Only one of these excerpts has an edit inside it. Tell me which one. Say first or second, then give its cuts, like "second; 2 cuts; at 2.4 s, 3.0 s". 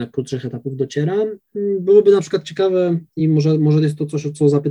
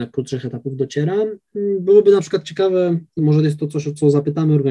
second; 1 cut; at 3.2 s